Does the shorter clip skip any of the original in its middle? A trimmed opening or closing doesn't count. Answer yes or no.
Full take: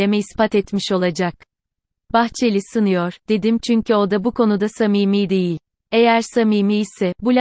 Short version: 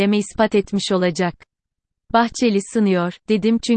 no